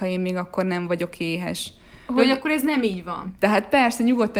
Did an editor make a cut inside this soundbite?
yes; 2 cuts; at 2.1 s, 3.4 s

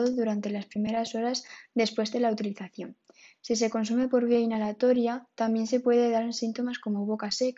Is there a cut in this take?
no; 0 cuts

